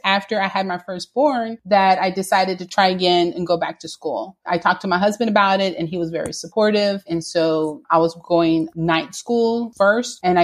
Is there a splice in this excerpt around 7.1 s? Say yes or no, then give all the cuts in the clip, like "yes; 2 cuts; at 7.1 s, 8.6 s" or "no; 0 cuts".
yes; 1 cut; at 7.1 s